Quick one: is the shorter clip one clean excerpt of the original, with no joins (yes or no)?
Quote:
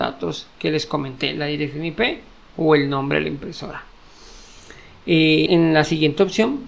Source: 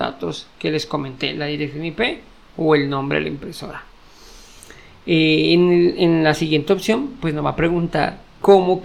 no